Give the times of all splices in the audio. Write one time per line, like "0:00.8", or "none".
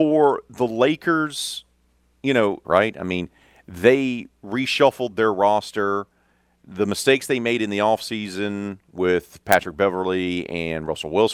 0:02.6